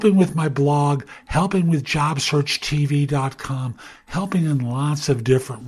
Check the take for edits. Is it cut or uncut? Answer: uncut